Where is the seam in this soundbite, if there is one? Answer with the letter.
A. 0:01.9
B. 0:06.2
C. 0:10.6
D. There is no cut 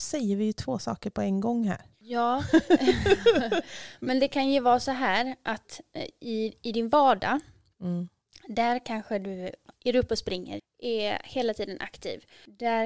C